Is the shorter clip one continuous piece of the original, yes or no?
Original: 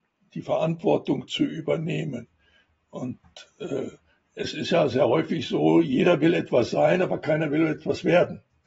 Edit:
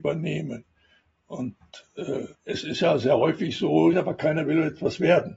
no